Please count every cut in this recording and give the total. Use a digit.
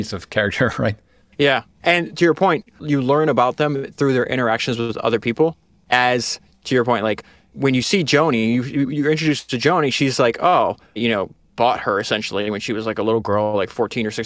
1